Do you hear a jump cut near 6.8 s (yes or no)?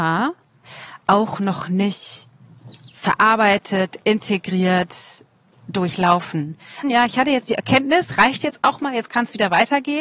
yes